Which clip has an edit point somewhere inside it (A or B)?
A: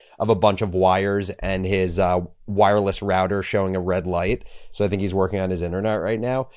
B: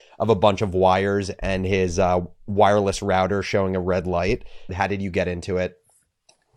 B